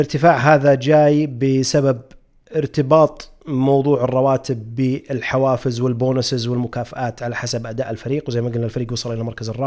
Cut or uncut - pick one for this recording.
uncut